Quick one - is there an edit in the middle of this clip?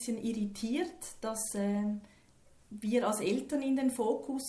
no; 0 cuts

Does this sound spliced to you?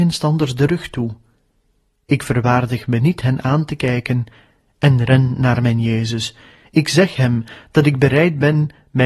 no; 0 cuts

